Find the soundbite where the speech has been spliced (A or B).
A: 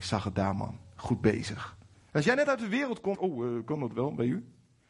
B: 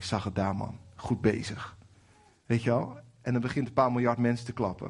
A